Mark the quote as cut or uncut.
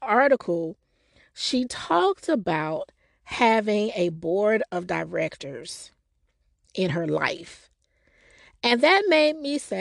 uncut